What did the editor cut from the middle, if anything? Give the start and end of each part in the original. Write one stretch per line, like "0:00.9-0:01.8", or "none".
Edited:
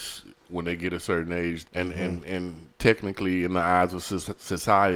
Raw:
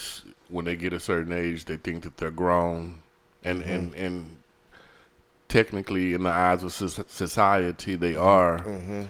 0:01.6-0:03.3
0:04.4-0:05.4